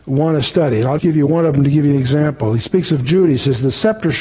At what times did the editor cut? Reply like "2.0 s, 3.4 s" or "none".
1.0 s